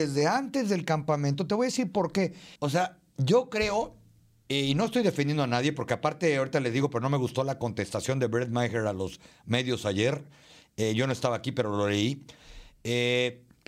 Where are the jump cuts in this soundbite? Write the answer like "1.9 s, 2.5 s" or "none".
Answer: 2.6 s